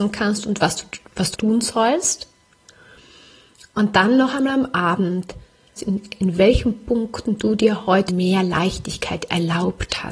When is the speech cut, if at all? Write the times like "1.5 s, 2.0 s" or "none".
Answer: 1.3 s, 5.8 s, 8.1 s